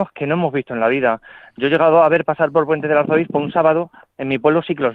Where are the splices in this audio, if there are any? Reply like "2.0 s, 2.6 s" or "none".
none